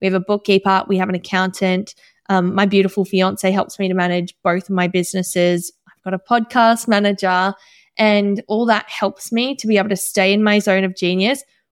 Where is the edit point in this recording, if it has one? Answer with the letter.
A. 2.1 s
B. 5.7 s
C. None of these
C